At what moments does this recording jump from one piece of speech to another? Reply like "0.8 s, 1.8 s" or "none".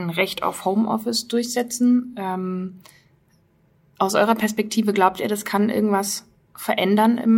none